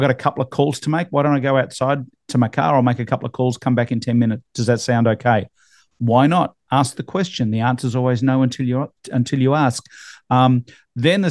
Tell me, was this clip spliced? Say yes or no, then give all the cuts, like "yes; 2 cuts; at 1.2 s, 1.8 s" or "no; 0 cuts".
no; 0 cuts